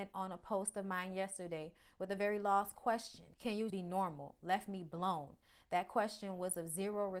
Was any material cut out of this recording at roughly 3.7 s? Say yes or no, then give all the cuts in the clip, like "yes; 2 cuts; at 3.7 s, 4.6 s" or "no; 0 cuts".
yes; 1 cut; at 3.7 s